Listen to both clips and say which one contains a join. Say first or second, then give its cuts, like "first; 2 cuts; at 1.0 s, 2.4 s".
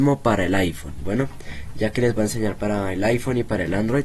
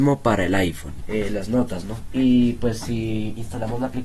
second; 1 cut; at 1.0 s